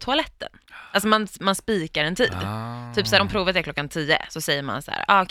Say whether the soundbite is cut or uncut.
uncut